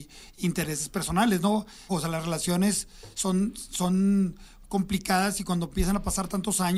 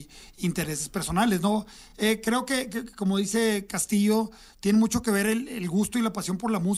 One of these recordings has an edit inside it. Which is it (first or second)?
first